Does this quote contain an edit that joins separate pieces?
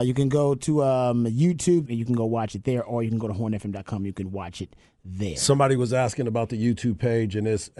yes; 1 cut; at 1.9 s

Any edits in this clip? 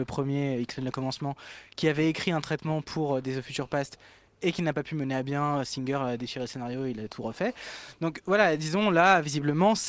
no; 0 cuts

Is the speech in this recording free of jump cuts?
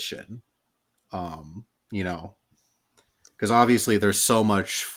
yes; 0 cuts

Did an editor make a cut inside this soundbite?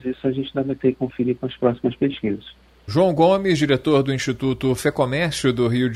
yes; 1 cut; at 2.9 s

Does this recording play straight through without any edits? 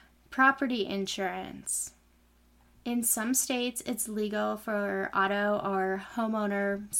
yes; 0 cuts

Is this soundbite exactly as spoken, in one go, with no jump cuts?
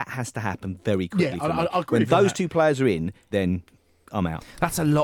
no; 1 cut; at 3.3 s

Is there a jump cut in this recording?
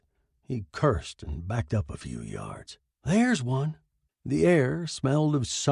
yes; 1 cut; at 4.1 s

